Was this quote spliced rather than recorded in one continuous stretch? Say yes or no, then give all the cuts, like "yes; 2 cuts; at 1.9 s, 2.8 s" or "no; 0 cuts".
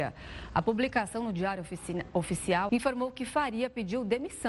yes; 1 cut; at 2.7 s